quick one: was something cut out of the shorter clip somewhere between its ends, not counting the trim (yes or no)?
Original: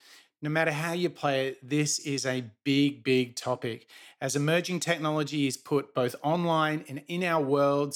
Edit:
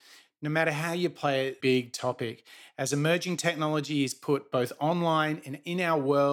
yes